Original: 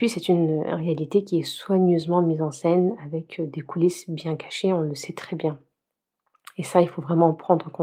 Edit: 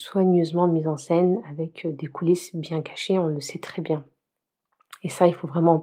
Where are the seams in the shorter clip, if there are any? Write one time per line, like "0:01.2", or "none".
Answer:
none